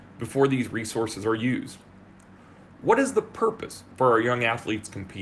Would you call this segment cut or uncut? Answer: uncut